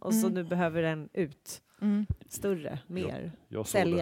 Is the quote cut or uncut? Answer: uncut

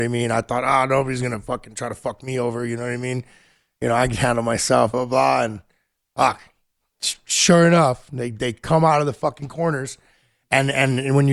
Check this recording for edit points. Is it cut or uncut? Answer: cut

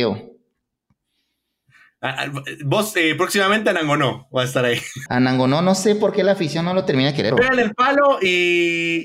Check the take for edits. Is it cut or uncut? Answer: cut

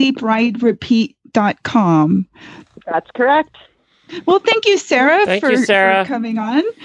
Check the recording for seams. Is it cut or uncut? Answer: uncut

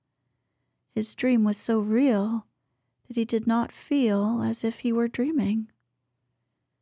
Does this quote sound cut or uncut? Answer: uncut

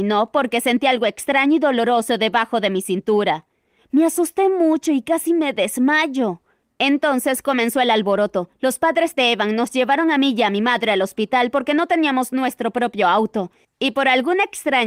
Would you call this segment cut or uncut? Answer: uncut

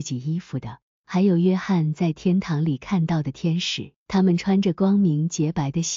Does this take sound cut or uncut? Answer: cut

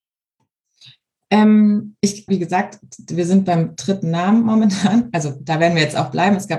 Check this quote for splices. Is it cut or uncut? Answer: cut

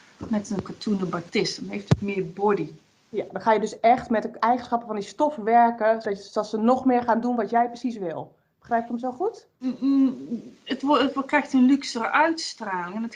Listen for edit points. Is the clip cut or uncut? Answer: cut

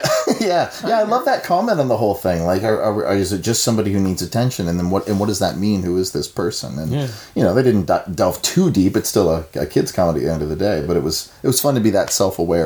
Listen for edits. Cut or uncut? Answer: uncut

